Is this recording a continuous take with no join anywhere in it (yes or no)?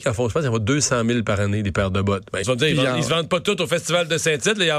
no